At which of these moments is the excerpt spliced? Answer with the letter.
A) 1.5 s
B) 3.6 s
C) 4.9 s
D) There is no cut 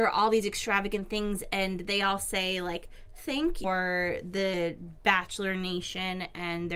B